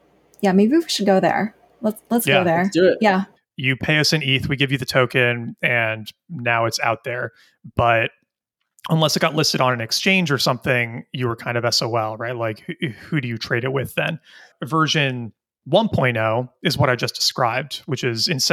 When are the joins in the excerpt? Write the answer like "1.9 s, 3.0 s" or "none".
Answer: 3.4 s